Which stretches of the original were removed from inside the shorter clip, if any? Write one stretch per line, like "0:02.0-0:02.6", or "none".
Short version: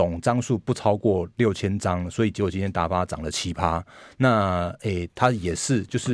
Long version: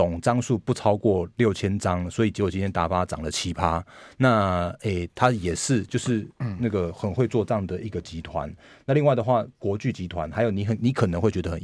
none